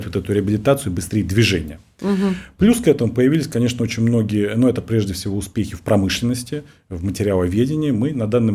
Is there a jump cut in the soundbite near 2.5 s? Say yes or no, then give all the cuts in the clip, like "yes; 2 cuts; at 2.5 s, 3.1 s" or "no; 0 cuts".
no; 0 cuts